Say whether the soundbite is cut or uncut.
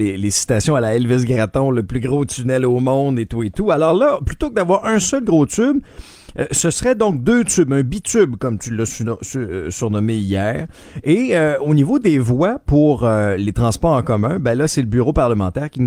uncut